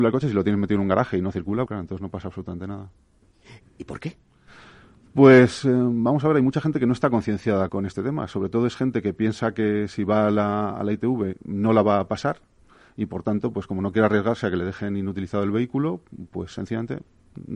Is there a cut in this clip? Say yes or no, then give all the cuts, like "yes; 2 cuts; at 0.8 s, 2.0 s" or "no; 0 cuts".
yes; 3 cuts; at 1.7 s, 3.6 s, 7.7 s